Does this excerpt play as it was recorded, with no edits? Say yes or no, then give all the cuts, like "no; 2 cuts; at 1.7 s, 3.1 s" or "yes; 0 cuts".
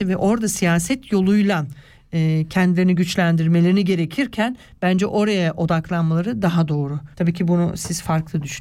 no; 1 cut; at 7.1 s